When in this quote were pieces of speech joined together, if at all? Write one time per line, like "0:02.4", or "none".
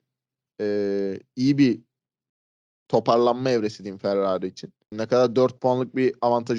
0:04.9